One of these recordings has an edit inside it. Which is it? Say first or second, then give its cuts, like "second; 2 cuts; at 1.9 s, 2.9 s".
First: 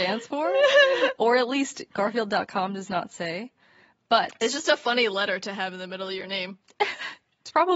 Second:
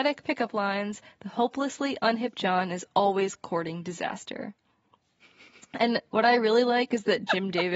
first; 1 cut; at 1.2 s